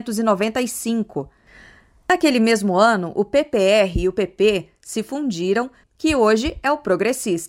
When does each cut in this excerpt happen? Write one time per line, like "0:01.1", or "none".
0:05.8